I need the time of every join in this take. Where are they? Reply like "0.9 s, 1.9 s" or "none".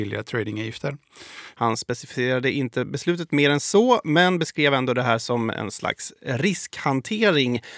1.5 s